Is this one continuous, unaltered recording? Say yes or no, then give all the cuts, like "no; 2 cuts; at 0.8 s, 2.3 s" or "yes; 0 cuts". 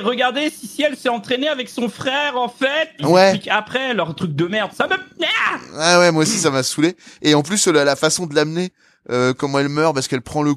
no; 1 cut; at 3.0 s